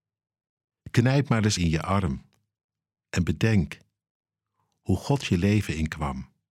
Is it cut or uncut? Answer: cut